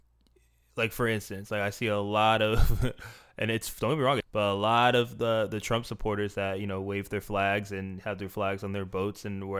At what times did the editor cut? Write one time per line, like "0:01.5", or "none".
0:04.2